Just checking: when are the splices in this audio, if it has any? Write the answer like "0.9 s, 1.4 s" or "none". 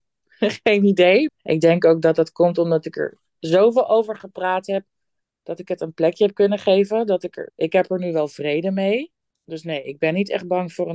1.3 s, 7.5 s